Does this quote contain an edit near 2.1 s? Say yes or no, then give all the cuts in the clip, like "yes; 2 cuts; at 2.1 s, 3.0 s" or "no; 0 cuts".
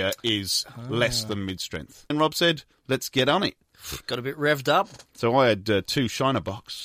yes; 1 cut; at 2.1 s